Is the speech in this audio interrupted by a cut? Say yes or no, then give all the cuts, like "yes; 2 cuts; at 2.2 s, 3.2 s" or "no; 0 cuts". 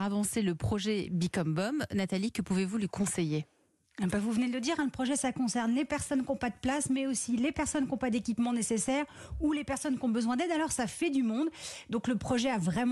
no; 0 cuts